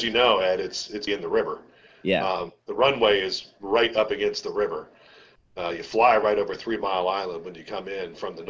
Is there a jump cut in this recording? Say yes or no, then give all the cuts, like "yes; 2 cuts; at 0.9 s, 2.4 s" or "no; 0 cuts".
yes; 1 cut; at 1.1 s